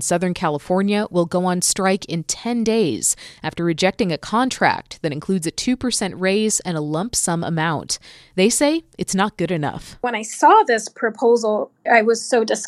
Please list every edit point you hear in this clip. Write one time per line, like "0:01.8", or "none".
none